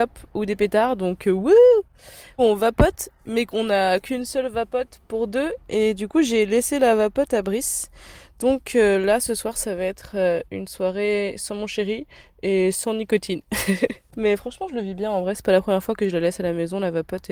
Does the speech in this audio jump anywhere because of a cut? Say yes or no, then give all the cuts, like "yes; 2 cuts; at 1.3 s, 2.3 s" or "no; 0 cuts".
yes; 1 cut; at 2.4 s